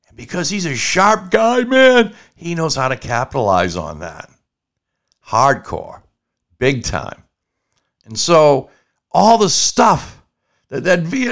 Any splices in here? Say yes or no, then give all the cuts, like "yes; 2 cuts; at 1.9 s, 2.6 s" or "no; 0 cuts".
no; 0 cuts